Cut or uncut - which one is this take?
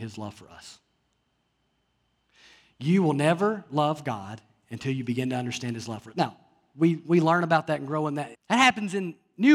cut